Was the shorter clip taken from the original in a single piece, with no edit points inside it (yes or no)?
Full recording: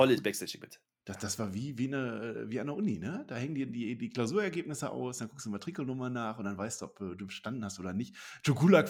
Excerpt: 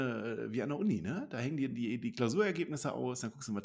yes